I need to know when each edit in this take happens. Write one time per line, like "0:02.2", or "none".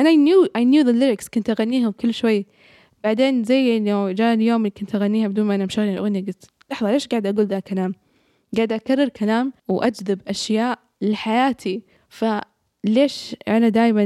0:09.6